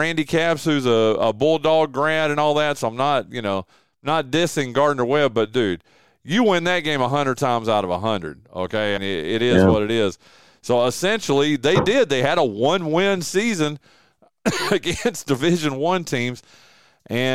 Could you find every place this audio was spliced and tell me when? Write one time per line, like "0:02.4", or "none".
0:09.0